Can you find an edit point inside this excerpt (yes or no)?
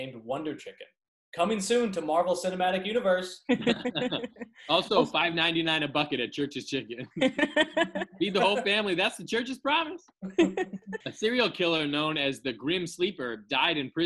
yes